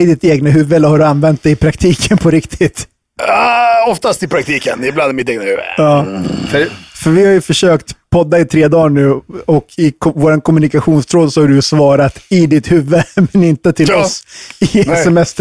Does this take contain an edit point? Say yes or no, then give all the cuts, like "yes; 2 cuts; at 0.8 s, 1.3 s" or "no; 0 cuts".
no; 0 cuts